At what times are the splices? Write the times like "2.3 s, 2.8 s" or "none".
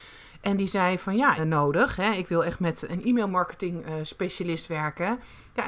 1.4 s, 2.9 s